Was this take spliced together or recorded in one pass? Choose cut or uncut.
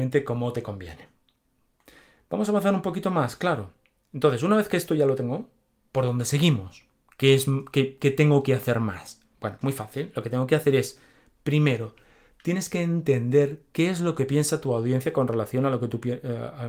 cut